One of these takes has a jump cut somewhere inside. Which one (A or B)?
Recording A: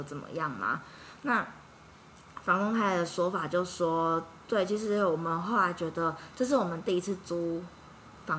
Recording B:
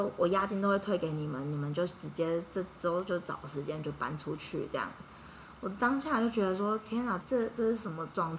B